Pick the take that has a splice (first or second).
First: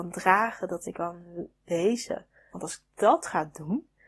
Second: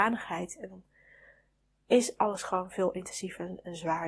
first